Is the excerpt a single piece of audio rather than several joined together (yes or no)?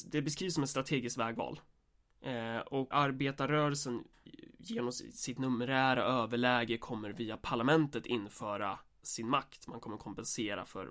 no